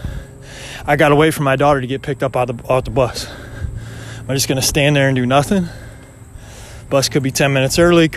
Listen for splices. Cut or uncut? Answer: cut